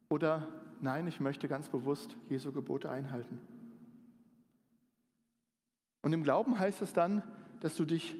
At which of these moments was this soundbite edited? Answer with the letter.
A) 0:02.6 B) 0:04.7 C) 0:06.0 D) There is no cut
D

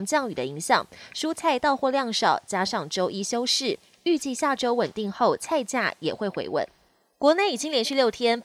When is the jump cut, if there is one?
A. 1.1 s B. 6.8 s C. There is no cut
C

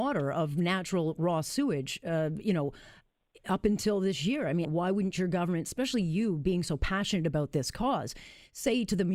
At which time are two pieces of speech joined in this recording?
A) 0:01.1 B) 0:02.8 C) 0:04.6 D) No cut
C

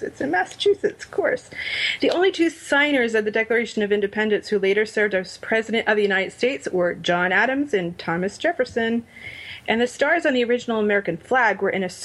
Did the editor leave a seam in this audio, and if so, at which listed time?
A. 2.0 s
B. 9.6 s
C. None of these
C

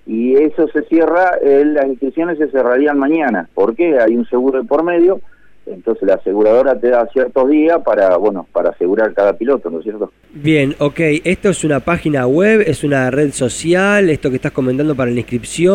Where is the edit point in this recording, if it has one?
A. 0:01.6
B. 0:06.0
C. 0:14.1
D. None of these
B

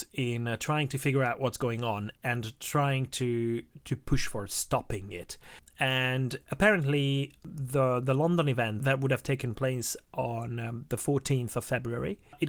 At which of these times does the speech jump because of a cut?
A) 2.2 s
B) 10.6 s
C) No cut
A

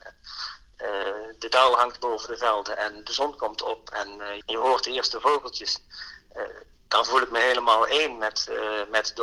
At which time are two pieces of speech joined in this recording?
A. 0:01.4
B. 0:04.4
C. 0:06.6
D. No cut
B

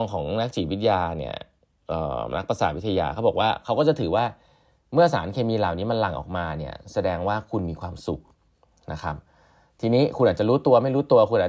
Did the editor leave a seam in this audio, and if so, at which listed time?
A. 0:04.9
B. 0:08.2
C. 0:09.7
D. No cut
D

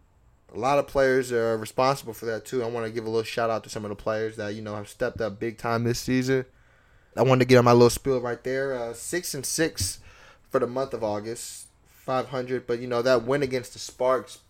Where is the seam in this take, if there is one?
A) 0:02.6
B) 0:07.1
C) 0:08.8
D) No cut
B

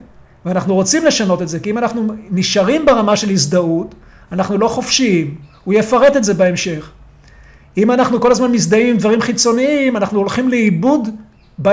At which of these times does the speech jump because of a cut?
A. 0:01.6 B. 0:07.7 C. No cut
C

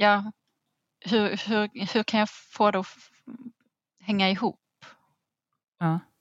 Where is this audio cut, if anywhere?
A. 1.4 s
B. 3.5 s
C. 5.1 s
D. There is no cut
D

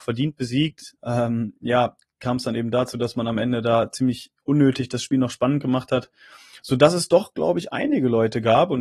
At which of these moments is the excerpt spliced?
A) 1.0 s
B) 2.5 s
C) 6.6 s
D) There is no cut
A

